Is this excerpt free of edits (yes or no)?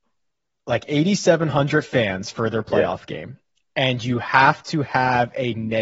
yes